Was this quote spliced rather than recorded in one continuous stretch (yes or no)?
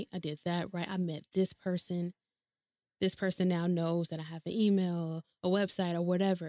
no